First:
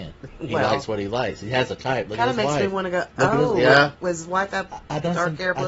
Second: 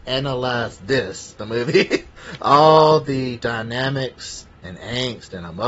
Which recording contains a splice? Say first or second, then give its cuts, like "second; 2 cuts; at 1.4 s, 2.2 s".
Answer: second; 1 cut; at 1.4 s